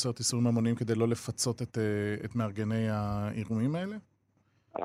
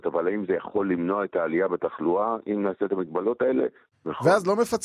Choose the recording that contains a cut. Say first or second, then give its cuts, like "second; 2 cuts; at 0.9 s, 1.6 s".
second; 1 cut; at 3.9 s